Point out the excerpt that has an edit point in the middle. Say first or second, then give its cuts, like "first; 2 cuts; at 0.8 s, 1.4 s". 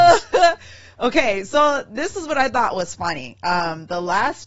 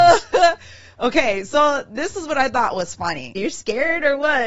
second; 1 cut; at 3.3 s